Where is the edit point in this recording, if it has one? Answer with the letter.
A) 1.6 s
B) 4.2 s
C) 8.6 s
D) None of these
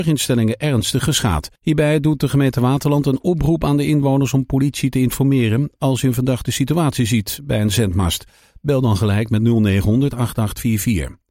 A